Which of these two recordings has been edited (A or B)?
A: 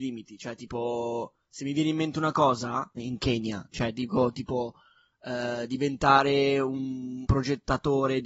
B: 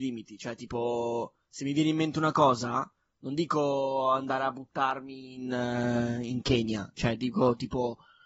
A